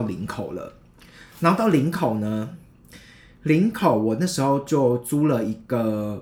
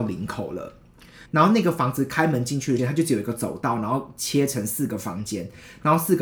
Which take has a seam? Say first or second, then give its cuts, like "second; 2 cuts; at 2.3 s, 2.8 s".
second; 2 cuts; at 1.3 s, 2.8 s